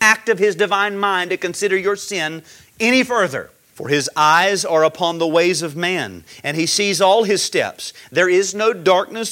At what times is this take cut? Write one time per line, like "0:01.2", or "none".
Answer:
0:03.7

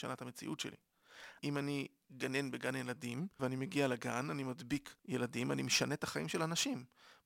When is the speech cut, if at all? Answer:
0:01.4
0:03.4
0:05.0

